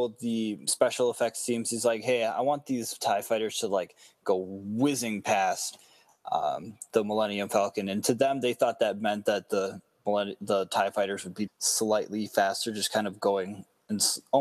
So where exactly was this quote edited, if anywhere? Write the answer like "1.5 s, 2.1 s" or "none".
11.5 s

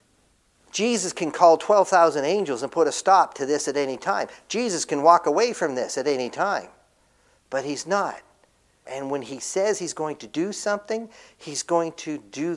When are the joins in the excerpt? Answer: 8.8 s

